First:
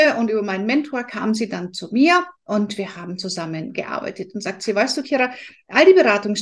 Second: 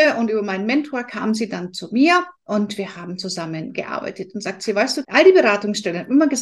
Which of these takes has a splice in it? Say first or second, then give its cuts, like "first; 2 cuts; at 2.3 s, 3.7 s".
second; 1 cut; at 5.0 s